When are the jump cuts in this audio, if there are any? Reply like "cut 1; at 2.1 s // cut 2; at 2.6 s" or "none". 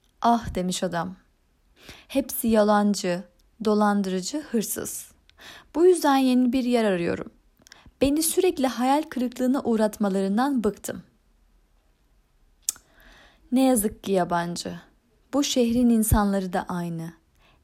none